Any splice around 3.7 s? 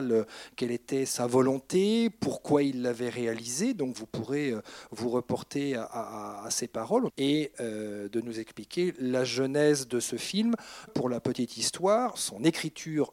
no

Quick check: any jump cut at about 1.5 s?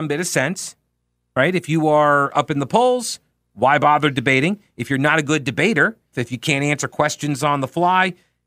no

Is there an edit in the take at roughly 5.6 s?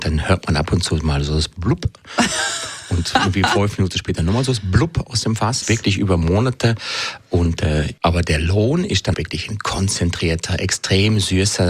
yes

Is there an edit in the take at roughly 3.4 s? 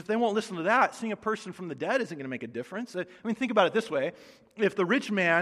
no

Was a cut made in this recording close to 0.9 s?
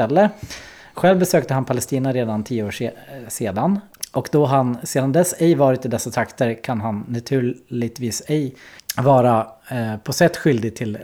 no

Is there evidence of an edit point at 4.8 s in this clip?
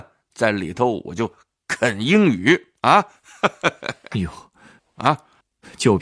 yes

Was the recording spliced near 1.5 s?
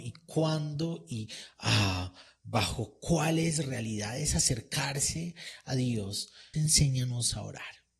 no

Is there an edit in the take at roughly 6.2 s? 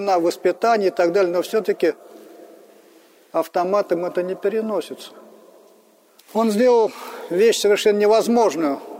yes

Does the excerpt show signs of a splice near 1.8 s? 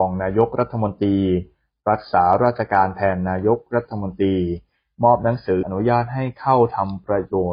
no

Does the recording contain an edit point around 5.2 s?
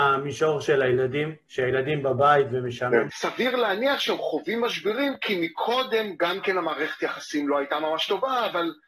no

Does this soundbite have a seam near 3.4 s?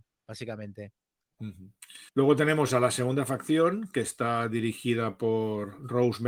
no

